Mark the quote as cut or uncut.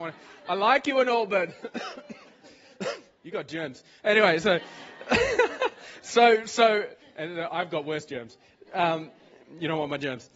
uncut